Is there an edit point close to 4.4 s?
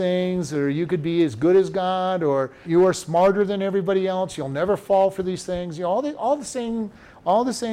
no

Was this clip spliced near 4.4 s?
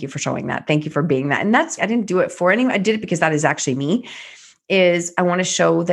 no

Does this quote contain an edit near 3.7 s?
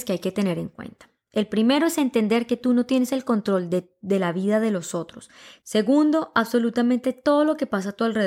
no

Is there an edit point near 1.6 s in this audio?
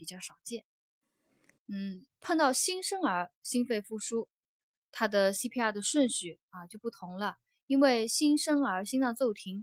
yes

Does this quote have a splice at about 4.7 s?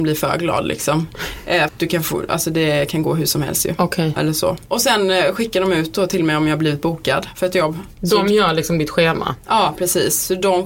no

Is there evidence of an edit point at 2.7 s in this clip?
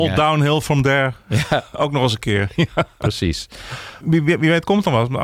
no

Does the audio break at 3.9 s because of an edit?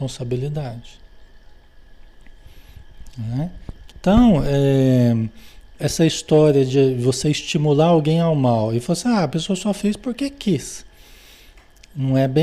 yes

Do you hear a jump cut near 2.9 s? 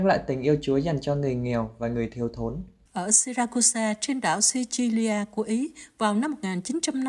yes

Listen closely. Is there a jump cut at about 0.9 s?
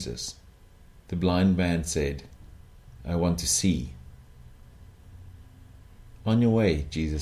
yes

